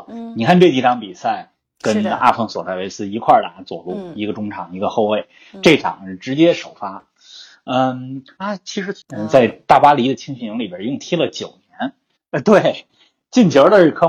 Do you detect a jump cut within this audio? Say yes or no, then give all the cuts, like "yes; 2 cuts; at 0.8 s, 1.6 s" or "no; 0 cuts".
yes; 3 cuts; at 1.7 s, 8.4 s, 12.2 s